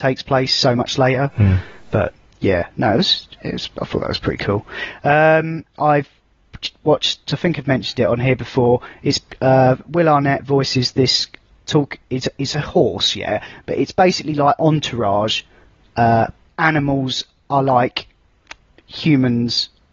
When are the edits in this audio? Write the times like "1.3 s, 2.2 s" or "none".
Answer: 5.8 s, 7.3 s, 16.5 s